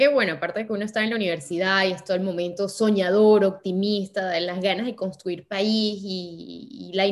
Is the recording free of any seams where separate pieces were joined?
yes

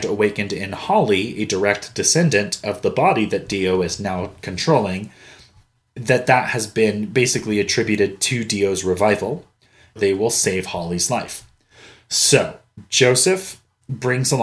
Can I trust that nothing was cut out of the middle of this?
no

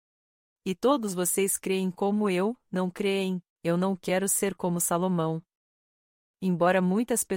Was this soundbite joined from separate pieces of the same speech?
yes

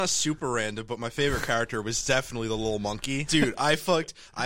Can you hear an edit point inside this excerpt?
yes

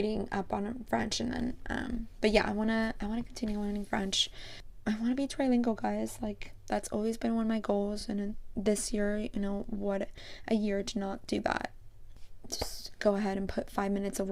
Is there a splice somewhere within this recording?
no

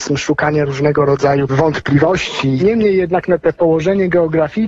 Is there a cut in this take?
yes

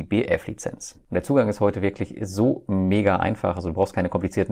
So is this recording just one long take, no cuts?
no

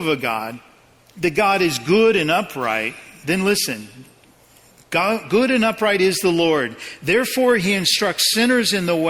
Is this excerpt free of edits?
yes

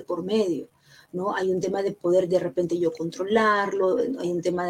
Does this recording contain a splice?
no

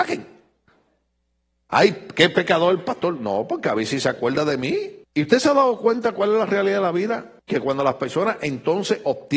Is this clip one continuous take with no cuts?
no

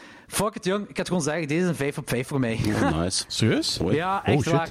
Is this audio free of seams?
yes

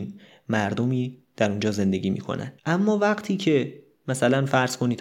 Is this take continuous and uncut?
no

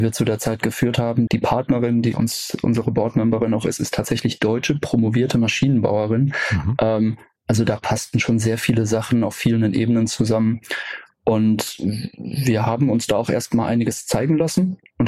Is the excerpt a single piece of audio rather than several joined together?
no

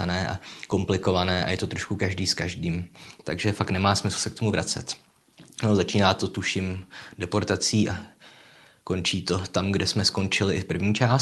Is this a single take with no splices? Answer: no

